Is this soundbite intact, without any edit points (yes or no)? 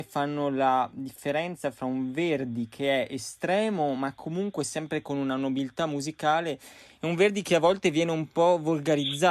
yes